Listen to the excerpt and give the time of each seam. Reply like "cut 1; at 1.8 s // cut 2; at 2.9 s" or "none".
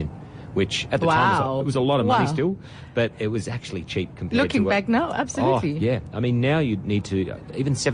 none